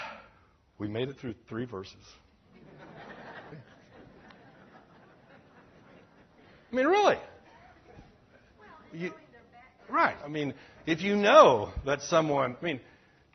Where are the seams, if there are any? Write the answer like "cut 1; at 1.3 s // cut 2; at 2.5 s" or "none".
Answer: cut 1; at 3.5 s // cut 2; at 10.2 s